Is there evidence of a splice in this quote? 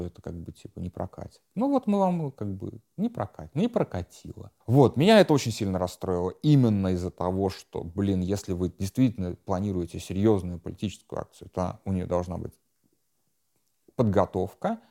yes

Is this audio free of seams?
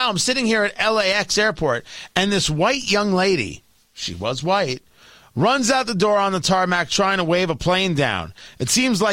yes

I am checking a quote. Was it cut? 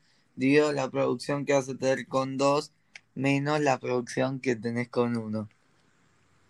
no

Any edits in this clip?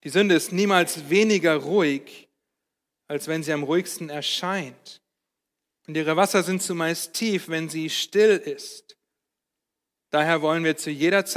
no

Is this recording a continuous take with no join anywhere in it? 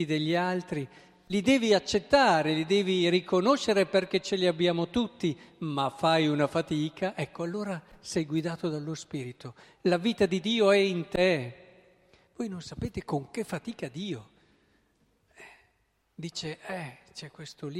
yes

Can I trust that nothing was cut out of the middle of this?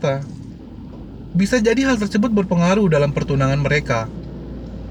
yes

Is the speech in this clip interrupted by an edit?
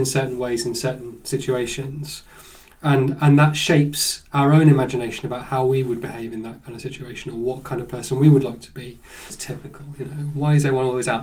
yes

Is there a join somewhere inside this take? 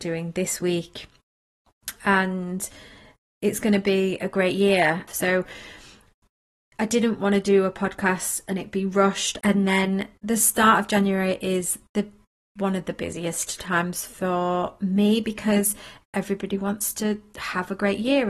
yes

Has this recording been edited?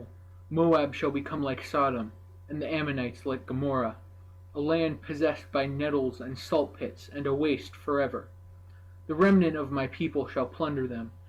no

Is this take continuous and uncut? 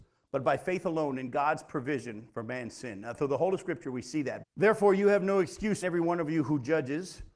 no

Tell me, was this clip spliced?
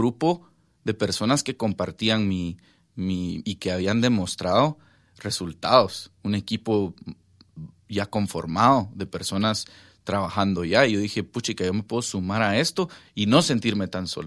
yes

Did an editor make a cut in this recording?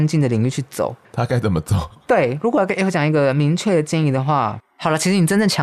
no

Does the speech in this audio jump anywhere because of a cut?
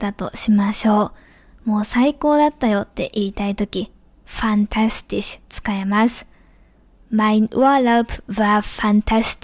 no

